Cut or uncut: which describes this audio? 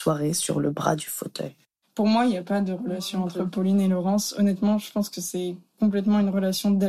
uncut